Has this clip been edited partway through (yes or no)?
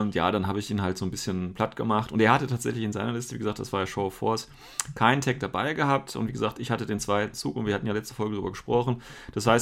no